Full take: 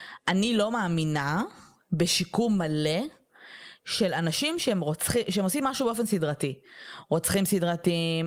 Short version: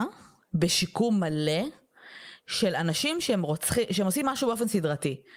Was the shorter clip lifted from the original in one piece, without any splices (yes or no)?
yes